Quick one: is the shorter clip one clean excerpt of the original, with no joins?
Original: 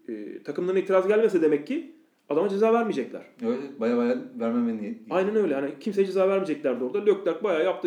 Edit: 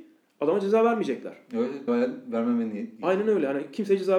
no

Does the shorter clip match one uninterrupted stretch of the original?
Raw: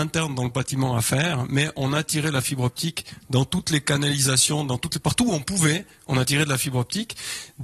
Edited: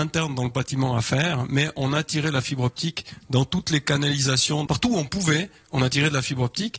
no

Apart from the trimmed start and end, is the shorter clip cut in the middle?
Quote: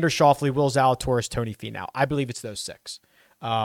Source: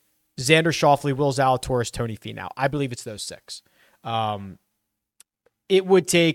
no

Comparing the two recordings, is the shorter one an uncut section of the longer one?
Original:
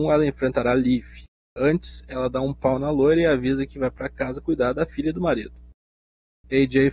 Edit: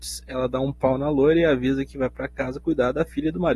yes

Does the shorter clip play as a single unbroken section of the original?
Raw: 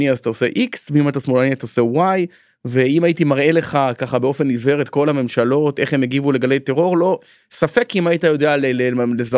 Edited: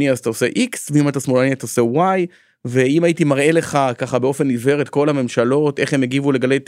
yes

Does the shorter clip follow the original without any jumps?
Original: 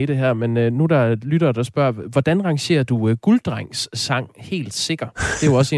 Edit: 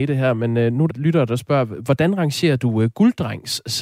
no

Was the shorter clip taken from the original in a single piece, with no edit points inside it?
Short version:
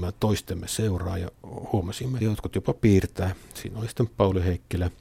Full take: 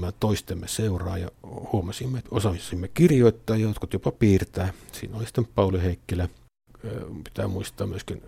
no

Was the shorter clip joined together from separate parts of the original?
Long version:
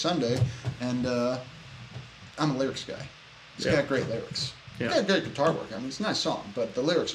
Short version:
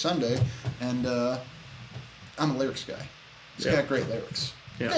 no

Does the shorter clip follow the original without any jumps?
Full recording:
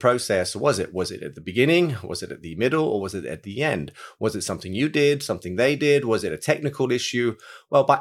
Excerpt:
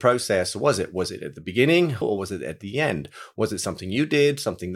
no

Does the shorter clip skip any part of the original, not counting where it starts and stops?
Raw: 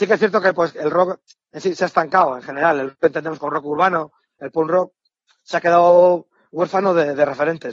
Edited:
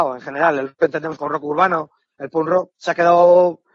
yes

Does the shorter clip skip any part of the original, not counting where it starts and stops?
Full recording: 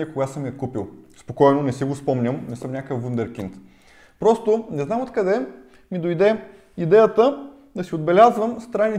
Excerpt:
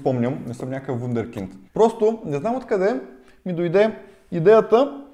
yes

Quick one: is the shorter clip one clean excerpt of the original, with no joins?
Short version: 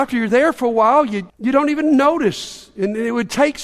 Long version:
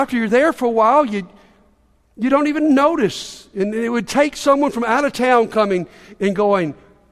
no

